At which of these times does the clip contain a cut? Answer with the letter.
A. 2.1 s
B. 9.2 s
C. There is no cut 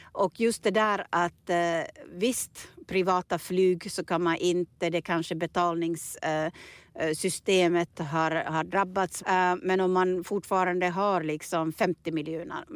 B